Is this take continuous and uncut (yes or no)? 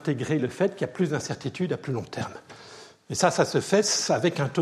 yes